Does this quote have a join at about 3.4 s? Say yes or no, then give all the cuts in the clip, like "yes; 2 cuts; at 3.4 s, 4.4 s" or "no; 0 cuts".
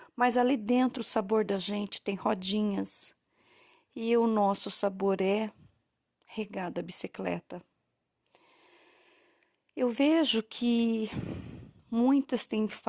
no; 0 cuts